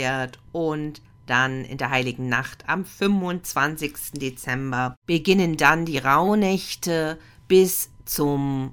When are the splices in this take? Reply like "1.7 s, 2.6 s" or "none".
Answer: none